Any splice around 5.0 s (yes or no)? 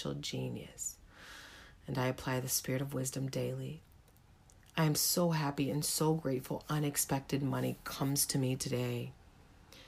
no